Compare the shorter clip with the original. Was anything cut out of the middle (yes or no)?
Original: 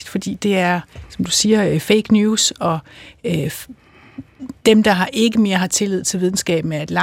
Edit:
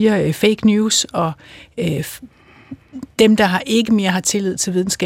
no